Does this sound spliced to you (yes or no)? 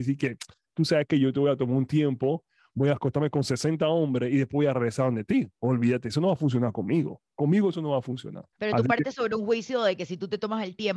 yes